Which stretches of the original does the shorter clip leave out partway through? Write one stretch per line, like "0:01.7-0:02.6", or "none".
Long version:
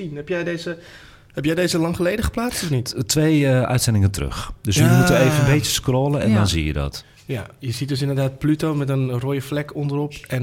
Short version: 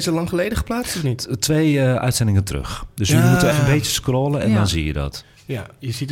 0:05.2-0:05.3